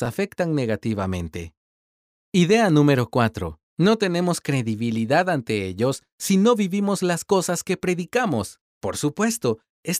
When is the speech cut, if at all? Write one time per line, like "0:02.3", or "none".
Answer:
0:03.7
0:08.6